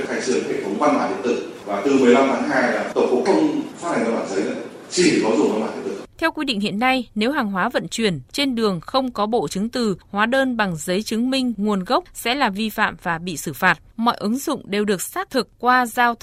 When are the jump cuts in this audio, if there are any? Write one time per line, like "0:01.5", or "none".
0:06.1
0:13.9